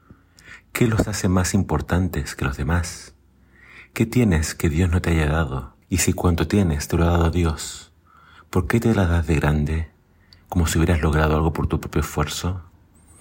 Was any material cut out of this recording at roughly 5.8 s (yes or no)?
yes